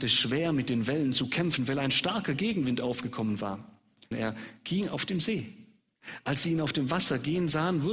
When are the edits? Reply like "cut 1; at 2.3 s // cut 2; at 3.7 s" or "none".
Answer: cut 1; at 4.1 s